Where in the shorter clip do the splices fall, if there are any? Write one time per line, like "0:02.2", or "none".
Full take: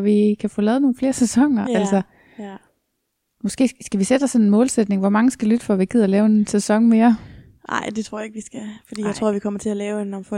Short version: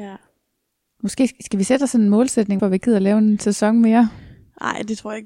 0:02.6